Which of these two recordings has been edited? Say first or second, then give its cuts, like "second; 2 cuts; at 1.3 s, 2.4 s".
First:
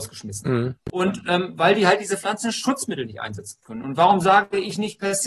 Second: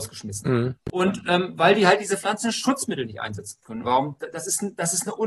second; 1 cut; at 3.8 s